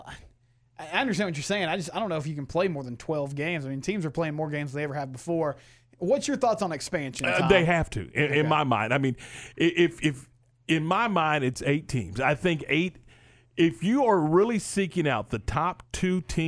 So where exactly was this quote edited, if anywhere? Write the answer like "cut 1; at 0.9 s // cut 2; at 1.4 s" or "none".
none